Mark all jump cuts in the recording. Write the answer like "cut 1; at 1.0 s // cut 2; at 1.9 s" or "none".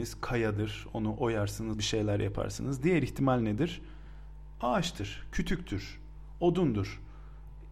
cut 1; at 1.7 s

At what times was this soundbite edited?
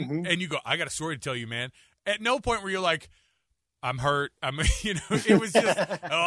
none

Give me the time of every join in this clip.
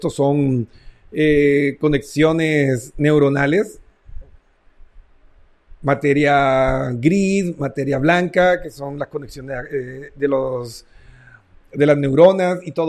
none

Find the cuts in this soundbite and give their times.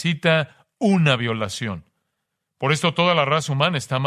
none

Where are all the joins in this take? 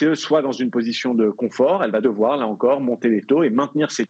cut 1; at 2.0 s

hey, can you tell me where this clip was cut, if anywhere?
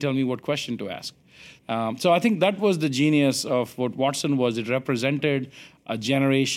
cut 1; at 1.6 s

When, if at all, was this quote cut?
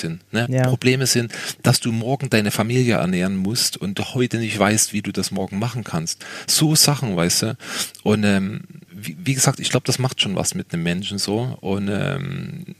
cut 1; at 8.9 s

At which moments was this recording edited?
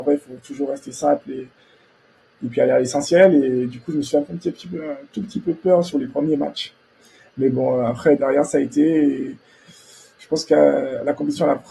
cut 1; at 8.2 s

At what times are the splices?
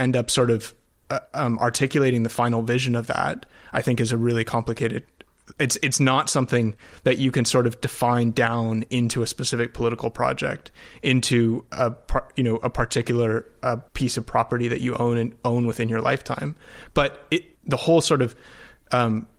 cut 1; at 13.9 s // cut 2; at 17.5 s

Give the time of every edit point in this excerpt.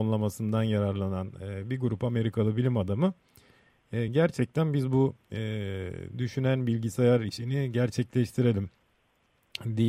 none

